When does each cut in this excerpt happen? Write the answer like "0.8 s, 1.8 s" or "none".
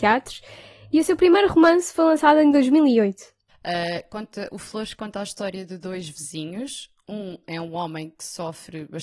3.5 s